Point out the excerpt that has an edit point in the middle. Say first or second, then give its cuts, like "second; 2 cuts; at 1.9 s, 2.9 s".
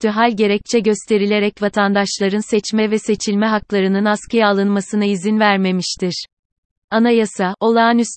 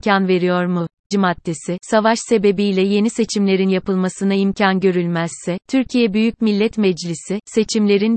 second; 1 cut; at 1.1 s